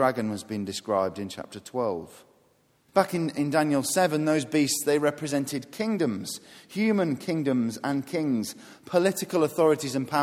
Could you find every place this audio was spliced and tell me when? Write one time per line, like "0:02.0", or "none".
0:02.9